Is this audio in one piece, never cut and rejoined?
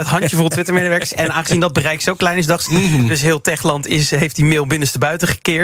no; 1 cut; at 2.7 s

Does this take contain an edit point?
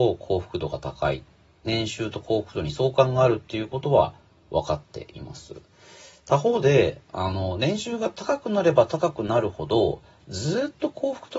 no; 0 cuts

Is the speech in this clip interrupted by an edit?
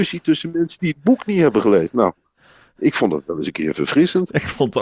no; 0 cuts

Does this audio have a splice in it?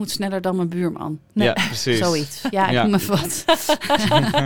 no; 0 cuts

